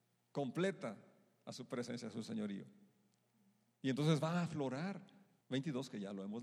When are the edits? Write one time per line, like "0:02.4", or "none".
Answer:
0:05.4